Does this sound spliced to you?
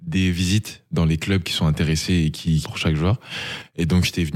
yes; 1 cut; at 2.6 s

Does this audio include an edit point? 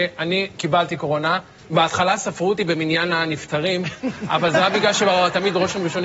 yes; 1 cut; at 1.6 s

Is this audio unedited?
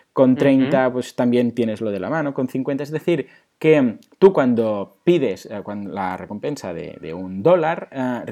yes; 0 cuts

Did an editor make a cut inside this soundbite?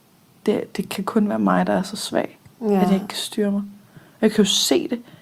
no; 0 cuts

